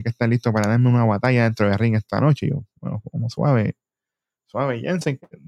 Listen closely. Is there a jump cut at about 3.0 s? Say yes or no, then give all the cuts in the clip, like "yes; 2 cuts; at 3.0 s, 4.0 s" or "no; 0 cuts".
no; 0 cuts